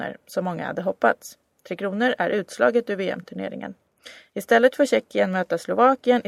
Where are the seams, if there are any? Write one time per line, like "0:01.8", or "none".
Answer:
none